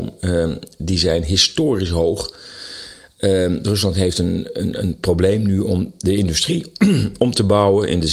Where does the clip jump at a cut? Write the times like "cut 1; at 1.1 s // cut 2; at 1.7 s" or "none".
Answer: none